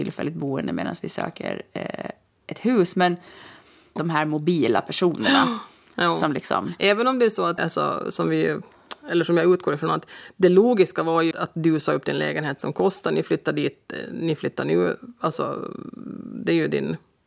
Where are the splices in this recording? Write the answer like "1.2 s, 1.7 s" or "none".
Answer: 4.0 s, 7.6 s, 11.3 s